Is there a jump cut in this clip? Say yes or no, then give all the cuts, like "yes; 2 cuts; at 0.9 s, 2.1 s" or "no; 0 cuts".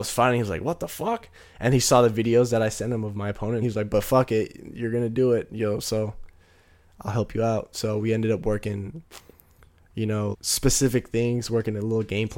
yes; 2 cuts; at 3.6 s, 10.3 s